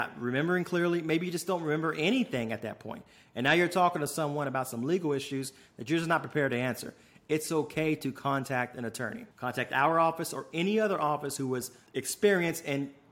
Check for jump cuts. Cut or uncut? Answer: cut